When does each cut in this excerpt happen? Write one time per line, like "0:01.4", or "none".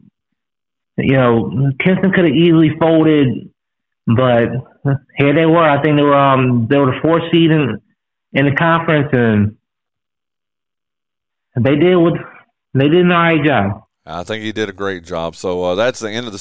none